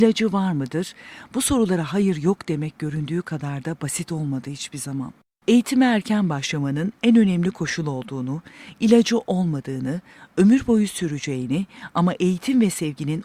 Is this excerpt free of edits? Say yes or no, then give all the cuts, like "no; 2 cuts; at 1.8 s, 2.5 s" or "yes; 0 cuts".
yes; 0 cuts